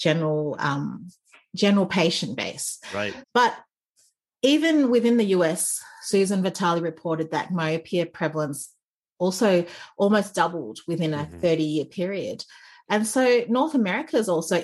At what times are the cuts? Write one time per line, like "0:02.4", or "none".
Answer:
0:03.2